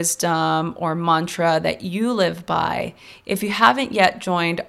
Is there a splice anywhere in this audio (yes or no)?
no